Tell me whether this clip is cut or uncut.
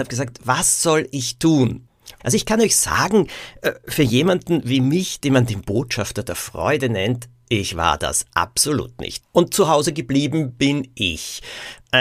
cut